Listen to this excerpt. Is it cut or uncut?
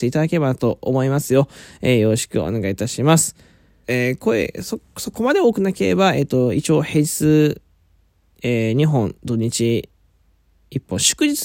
cut